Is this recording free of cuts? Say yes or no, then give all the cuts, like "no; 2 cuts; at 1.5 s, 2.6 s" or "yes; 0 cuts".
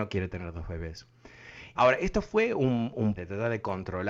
no; 2 cuts; at 1.7 s, 3.2 s